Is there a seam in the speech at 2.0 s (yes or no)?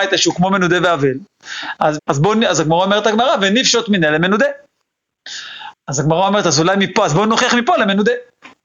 yes